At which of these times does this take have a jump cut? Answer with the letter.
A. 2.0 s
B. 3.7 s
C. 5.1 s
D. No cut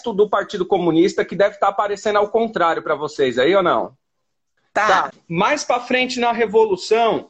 C